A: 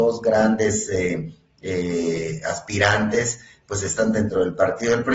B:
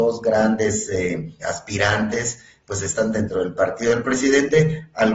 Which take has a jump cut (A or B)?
B